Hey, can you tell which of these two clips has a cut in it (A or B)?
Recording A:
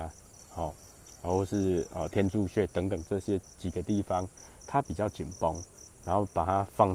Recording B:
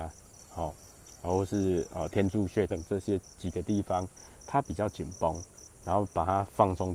B